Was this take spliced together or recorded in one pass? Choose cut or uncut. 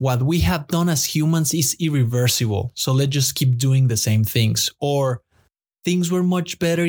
uncut